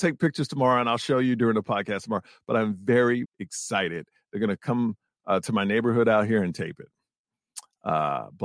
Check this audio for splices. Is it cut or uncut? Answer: cut